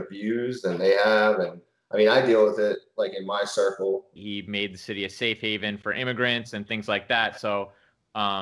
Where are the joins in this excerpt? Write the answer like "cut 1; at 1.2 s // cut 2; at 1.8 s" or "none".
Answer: cut 1; at 4.2 s